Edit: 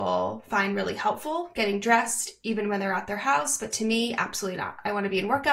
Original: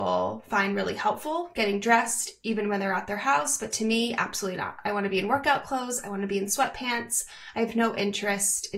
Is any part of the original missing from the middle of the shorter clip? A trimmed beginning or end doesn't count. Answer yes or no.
no